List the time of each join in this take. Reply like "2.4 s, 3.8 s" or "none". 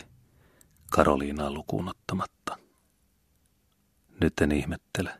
4.0 s